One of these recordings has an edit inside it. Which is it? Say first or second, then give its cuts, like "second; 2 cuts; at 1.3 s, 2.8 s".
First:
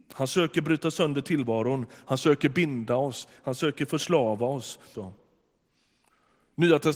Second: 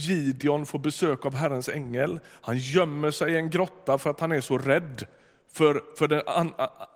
first; 1 cut; at 4.9 s